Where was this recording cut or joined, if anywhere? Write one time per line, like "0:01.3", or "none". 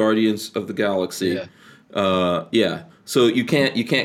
none